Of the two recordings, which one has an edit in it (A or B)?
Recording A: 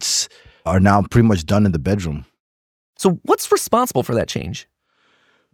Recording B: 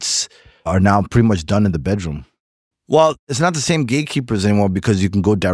B